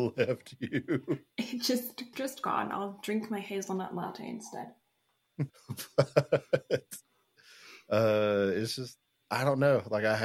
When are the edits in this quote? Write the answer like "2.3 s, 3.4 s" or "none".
2.1 s, 5.5 s